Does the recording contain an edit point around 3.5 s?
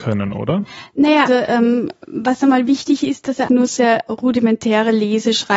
yes; 2 cuts; at 1.3 s, 3.5 s

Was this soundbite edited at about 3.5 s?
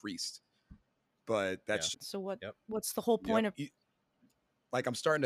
yes; 2 cuts; at 1.9 s, 3.5 s

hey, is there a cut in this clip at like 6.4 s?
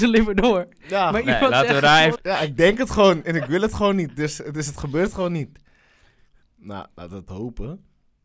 yes; 2 cuts; at 2.2 s, 6.4 s

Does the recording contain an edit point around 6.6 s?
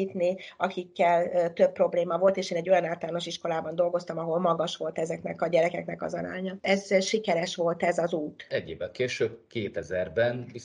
no; 1 cut; at 8.5 s

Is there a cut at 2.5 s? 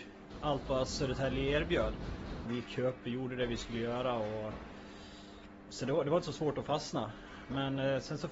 yes; 1 cut; at 2.5 s

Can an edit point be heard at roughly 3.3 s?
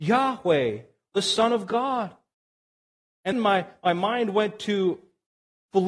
yes; 1 cut; at 3.3 s

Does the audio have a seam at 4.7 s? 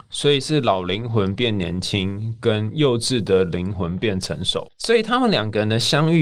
yes; 1 cut; at 4.7 s

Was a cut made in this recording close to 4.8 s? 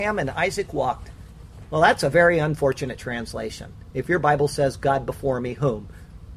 no; 0 cuts

